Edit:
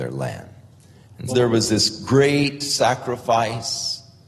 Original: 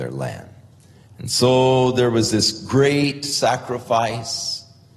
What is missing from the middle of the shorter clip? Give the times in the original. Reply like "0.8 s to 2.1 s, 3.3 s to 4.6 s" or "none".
1.3 s to 1.9 s